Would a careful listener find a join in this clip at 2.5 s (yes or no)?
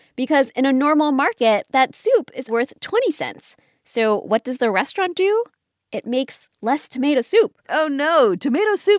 yes